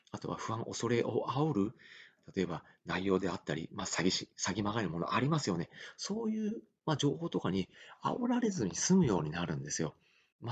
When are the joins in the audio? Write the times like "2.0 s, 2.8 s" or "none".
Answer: none